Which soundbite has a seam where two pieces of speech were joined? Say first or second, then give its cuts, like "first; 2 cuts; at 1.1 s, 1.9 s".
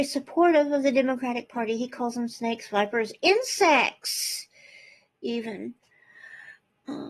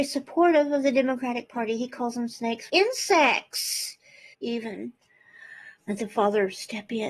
second; 3 cuts; at 2.7 s, 4.3 s, 5.8 s